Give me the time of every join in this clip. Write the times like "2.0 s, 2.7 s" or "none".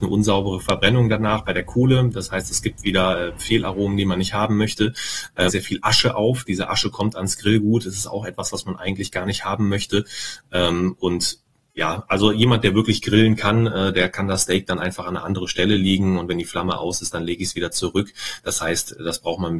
5.5 s